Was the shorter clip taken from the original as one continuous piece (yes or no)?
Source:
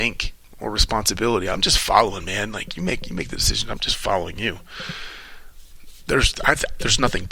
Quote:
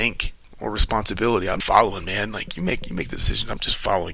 no